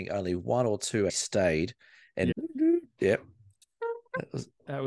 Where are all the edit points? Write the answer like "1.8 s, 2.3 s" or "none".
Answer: 1.1 s, 2.3 s